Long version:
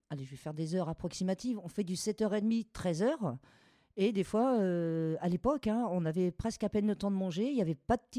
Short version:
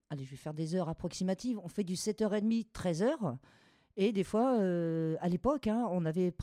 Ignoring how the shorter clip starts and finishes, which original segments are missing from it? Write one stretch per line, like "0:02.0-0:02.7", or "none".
none